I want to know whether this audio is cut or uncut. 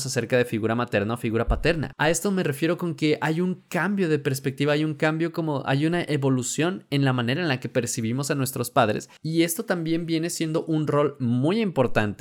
cut